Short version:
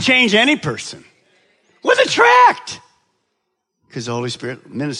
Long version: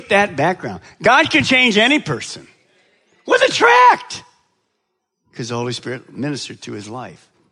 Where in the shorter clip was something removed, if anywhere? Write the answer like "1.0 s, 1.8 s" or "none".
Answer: none